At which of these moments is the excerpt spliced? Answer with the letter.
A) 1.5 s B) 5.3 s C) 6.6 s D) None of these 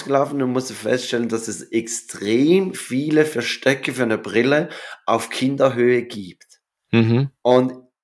D